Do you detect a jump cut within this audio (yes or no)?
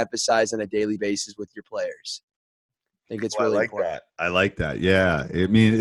no